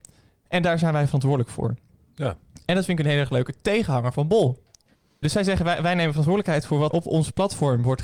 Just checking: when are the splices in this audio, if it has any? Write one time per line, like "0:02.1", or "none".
0:05.2
0:06.9